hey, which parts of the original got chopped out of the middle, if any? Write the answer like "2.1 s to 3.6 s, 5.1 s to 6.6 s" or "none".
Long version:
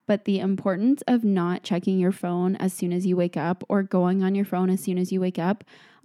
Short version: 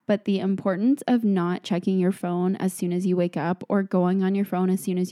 none

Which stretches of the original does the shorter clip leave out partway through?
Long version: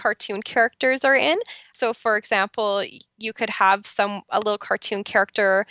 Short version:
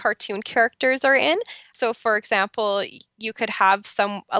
none

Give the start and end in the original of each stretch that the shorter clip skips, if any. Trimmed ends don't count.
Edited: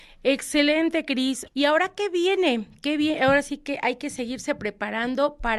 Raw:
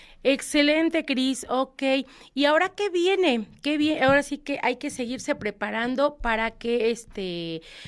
1.5 s to 2.3 s

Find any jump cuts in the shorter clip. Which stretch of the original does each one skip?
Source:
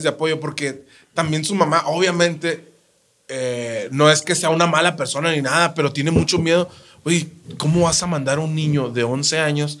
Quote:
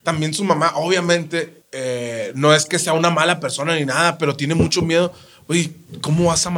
2.7 s to 3.2 s

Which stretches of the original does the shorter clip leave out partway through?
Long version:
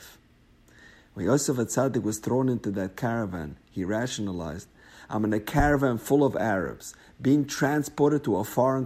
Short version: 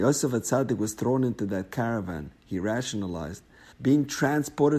5.0 s to 7.1 s

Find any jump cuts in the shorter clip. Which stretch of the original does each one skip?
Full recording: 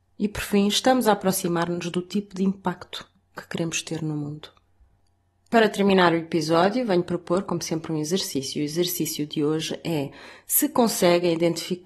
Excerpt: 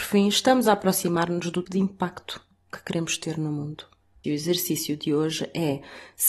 2.0 s to 2.3 s, 4.9 s to 8.5 s

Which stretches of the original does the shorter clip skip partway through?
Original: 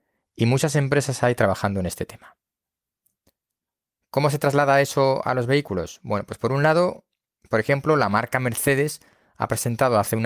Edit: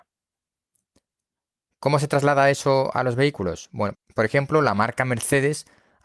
6.3 s to 7.3 s

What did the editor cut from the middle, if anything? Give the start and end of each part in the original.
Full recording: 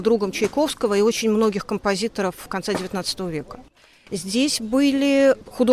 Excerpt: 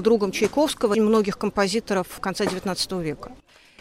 0.9 s to 1.2 s

